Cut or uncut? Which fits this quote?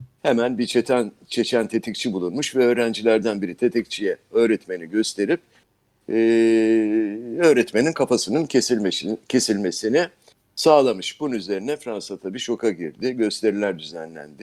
uncut